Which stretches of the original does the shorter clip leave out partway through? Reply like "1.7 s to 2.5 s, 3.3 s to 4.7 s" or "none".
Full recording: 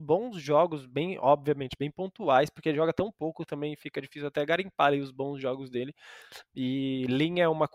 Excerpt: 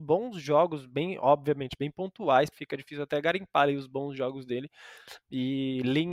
2.5 s to 3.8 s